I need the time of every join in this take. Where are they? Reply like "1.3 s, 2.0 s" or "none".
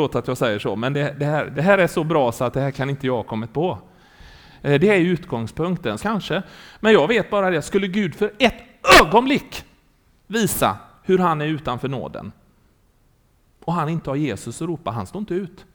1.5 s, 6.0 s

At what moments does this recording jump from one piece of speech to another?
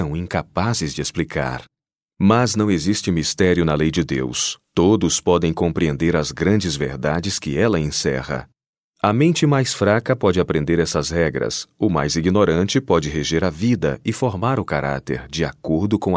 none

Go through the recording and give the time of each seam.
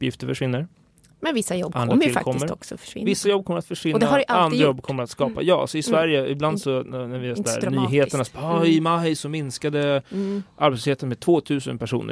none

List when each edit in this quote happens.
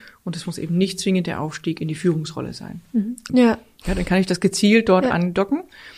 3.3 s

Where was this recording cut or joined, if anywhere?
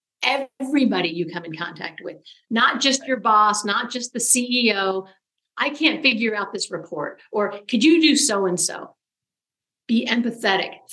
5.4 s

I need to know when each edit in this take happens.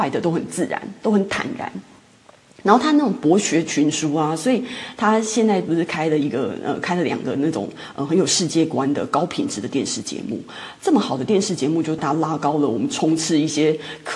12.0 s

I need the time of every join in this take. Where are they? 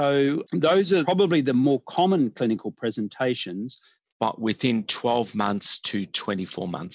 4.1 s

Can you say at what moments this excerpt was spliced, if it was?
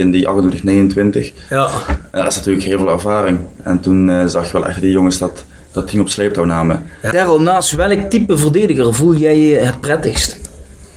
3.6 s, 7.1 s

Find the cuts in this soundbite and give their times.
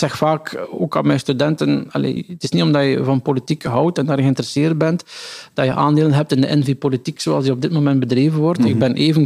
2.2 s

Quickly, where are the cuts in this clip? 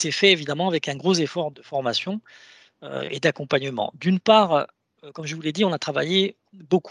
1.5 s

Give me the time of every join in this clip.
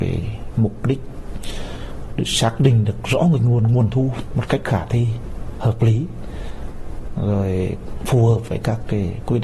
none

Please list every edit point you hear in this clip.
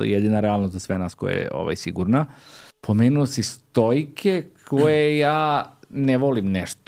2.7 s

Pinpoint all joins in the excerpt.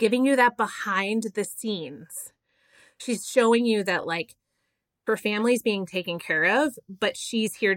none

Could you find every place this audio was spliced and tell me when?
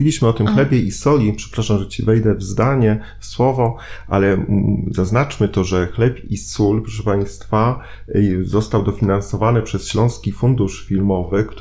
none

